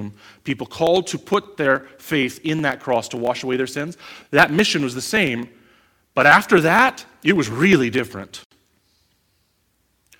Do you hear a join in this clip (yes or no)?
no